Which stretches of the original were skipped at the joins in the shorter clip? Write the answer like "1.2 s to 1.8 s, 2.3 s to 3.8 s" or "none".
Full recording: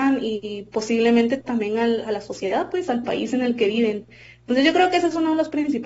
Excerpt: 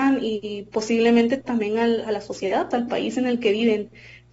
2.7 s to 2.9 s